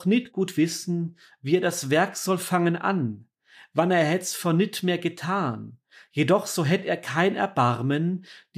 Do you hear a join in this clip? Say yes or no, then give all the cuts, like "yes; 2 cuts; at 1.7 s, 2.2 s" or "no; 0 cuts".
no; 0 cuts